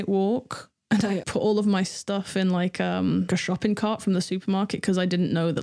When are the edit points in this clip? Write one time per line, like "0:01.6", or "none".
0:01.2
0:03.3